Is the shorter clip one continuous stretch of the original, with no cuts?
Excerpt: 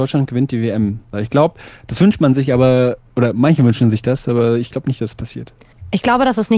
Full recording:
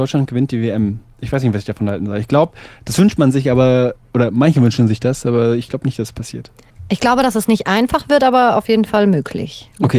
no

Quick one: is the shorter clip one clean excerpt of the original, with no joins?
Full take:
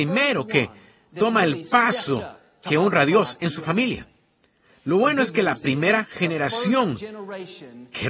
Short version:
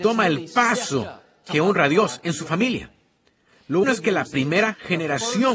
no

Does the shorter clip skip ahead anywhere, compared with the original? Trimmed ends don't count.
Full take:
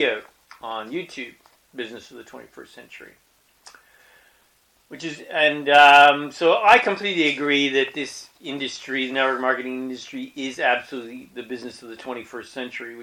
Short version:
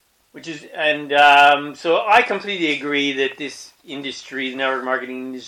no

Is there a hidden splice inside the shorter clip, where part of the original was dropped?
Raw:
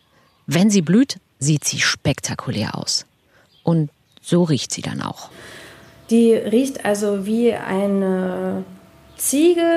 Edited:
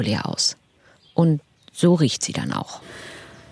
no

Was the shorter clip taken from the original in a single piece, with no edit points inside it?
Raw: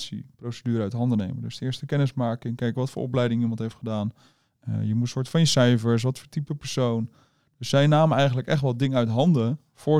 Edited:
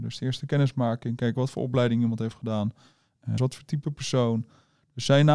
no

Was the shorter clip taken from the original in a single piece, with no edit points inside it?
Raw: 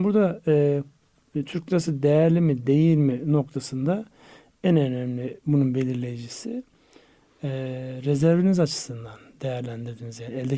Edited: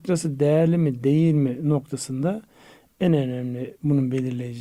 yes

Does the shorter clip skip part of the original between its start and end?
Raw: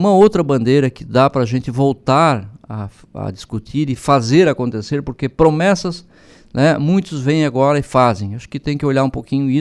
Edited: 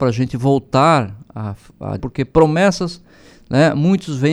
yes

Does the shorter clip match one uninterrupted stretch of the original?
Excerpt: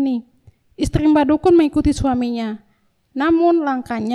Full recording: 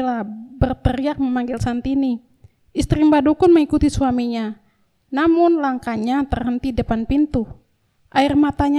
yes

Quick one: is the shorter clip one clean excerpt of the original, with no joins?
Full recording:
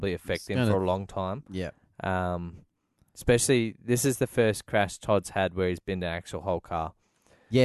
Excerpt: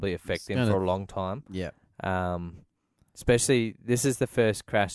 yes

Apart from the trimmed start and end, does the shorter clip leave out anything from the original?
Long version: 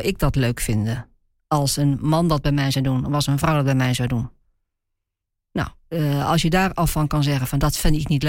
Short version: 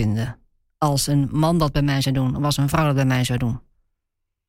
no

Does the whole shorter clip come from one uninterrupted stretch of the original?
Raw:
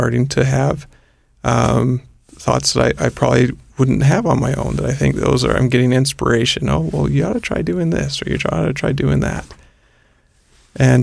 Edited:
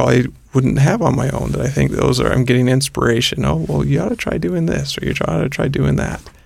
yes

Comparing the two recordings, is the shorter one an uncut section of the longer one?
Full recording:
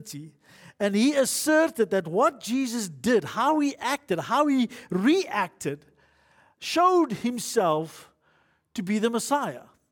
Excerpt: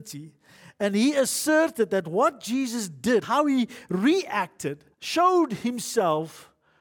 no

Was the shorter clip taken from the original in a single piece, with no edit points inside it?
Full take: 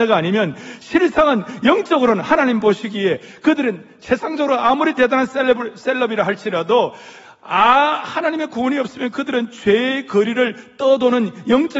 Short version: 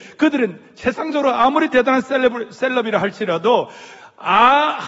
yes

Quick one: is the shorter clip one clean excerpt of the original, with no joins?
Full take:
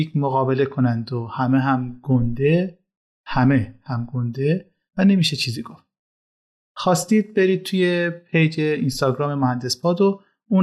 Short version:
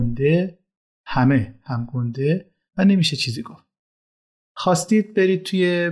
yes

